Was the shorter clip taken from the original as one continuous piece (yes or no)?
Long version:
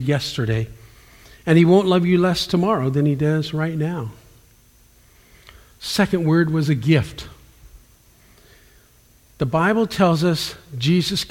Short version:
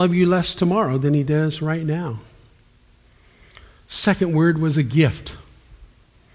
yes